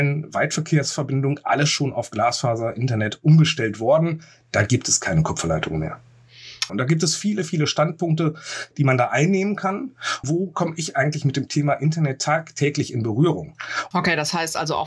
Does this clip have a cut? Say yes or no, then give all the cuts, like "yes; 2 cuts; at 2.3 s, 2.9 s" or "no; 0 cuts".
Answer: yes; 3 cuts; at 6.7 s, 10.2 s, 13.9 s